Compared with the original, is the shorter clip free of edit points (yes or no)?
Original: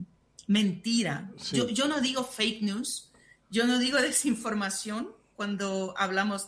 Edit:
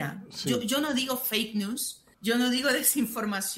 no